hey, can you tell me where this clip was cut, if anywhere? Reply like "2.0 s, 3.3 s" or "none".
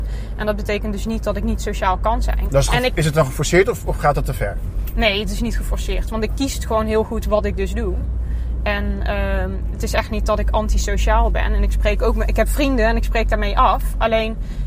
2.5 s

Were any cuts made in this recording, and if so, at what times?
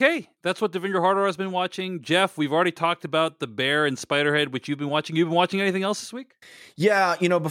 none

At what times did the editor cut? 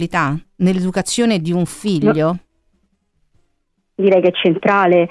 none

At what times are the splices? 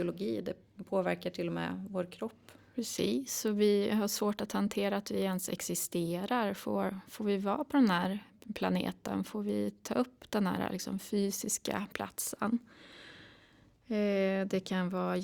none

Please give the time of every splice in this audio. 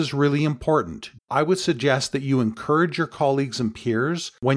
1.2 s

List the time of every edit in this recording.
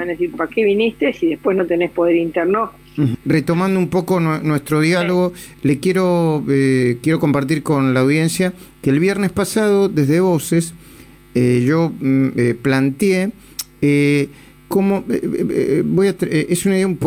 3.1 s

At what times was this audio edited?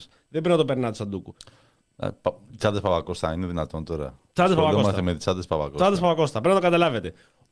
none

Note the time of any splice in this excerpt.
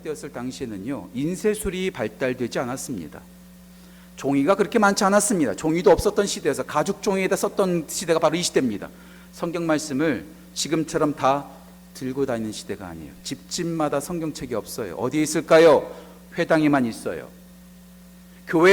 none

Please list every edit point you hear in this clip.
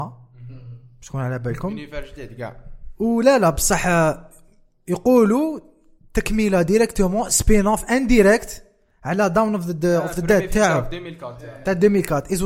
none

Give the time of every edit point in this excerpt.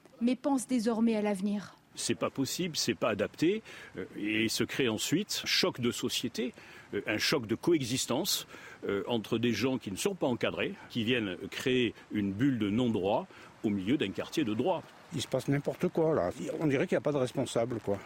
5.4 s, 15.1 s

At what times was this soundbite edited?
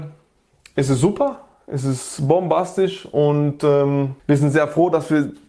4.2 s

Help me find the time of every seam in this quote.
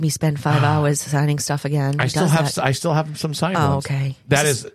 none

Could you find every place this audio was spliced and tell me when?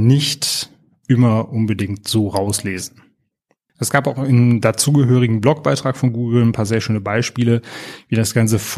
3.7 s

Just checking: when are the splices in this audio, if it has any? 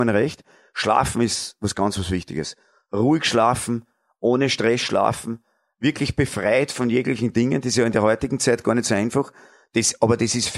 none

